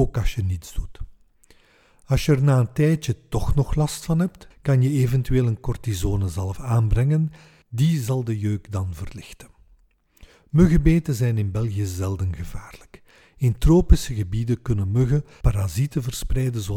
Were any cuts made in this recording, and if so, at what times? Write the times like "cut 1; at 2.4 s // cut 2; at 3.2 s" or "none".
cut 1; at 4.5 s